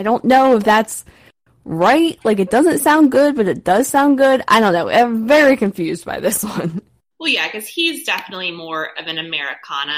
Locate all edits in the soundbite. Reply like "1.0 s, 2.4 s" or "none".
none